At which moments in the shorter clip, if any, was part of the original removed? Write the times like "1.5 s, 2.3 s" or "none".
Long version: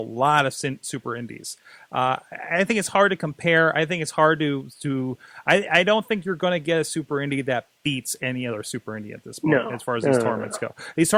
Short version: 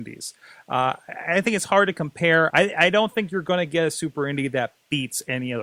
2.5 s